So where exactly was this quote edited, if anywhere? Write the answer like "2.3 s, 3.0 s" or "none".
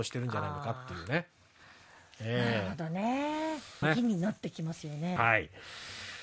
3.8 s, 5.2 s